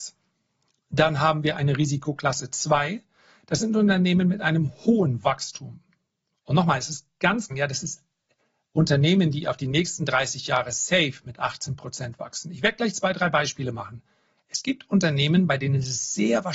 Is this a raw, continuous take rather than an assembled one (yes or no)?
no